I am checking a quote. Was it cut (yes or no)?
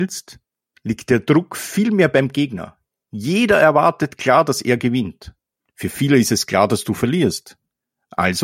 yes